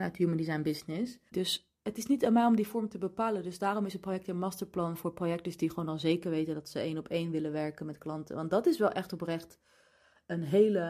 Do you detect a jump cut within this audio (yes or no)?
yes